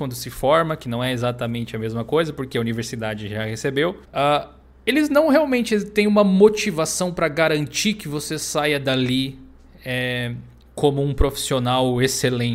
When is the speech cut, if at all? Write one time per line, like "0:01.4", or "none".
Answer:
0:04.0